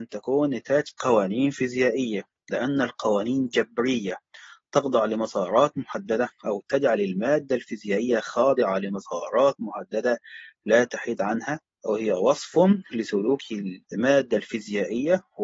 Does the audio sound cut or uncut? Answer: cut